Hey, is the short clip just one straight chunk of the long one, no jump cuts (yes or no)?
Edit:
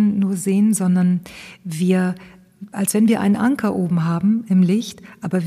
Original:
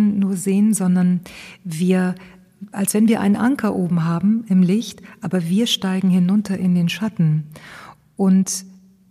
yes